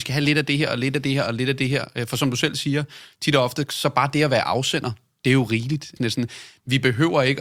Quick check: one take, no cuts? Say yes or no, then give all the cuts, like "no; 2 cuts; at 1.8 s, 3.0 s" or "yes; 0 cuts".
no; 1 cut; at 6.0 s